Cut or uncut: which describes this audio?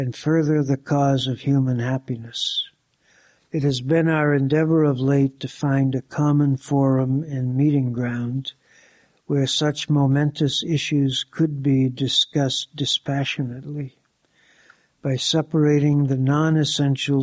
cut